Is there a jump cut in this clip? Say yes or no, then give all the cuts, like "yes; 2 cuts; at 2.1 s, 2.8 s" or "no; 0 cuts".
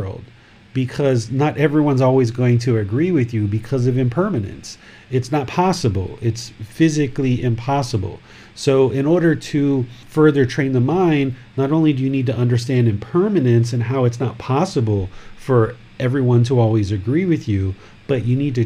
no; 0 cuts